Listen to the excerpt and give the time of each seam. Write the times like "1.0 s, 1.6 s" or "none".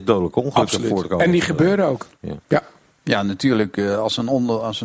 2.2 s